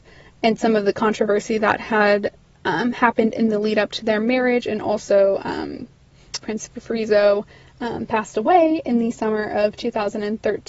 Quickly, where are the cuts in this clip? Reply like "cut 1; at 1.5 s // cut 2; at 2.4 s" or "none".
cut 1; at 6.4 s